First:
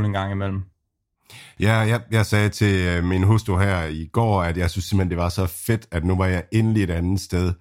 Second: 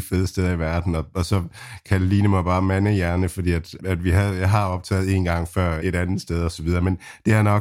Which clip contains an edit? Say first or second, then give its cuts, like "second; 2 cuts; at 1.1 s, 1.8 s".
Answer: second; 2 cuts; at 3.8 s, 5.8 s